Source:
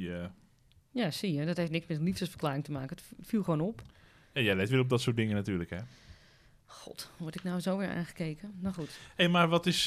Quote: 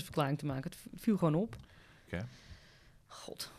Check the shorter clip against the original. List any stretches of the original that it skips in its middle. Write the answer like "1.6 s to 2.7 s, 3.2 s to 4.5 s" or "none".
4.3 s to 5.7 s